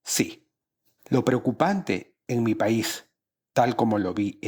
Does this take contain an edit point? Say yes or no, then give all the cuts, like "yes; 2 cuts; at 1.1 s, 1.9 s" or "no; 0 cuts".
yes; 1 cut; at 1.0 s